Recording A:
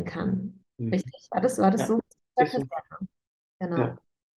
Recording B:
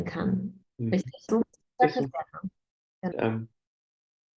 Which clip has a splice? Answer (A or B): B